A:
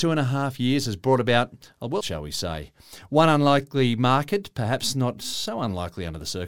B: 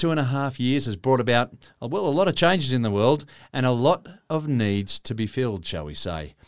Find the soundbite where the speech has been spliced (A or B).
A